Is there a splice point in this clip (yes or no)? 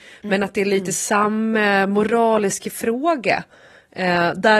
no